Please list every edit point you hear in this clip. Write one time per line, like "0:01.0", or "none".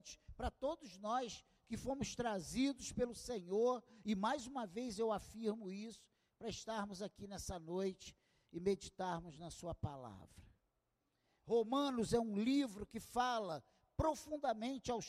none

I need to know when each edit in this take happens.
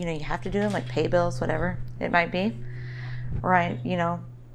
0:03.4

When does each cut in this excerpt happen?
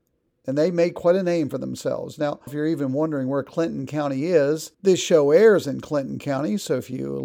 0:02.5
0:04.7

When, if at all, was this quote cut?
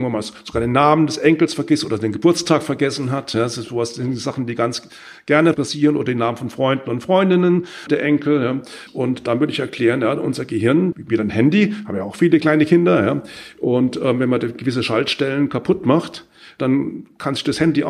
0:10.9

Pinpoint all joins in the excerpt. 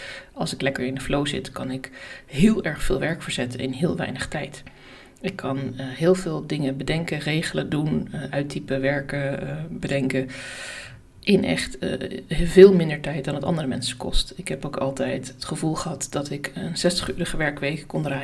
none

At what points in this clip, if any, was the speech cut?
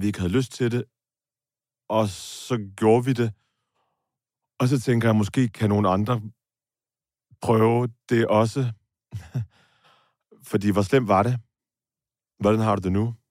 none

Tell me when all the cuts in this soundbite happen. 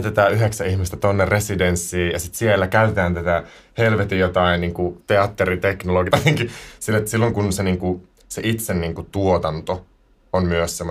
0:06.1

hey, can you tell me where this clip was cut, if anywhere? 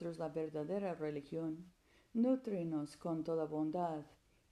none

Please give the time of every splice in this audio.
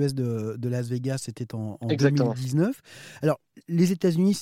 none

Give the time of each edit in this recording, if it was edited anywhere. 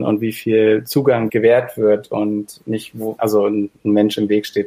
0:01.3
0:03.2

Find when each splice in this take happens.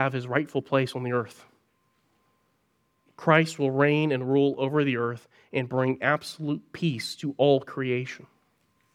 none

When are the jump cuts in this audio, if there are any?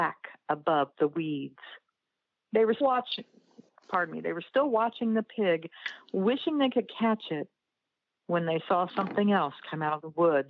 0:02.8

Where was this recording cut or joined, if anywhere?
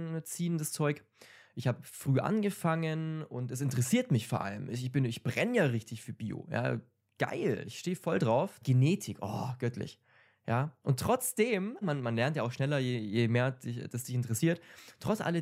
0:08.6
0:11.8

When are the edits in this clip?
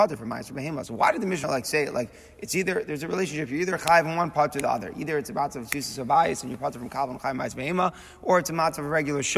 none

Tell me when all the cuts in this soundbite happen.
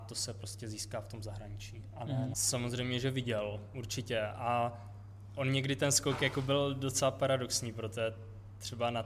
0:02.3

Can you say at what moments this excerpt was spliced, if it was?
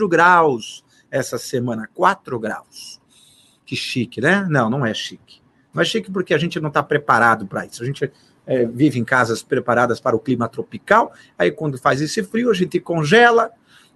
none

